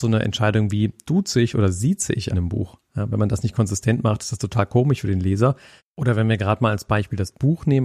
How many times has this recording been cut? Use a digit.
2